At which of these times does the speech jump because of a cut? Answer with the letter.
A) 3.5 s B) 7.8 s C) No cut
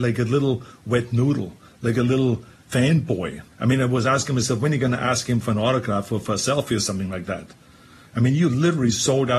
A